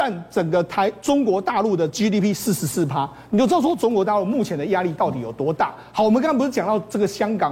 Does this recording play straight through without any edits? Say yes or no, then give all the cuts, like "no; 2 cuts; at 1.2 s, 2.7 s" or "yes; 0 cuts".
yes; 0 cuts